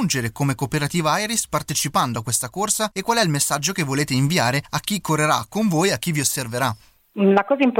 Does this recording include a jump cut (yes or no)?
no